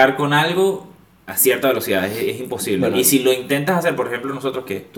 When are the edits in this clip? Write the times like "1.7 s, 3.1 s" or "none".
none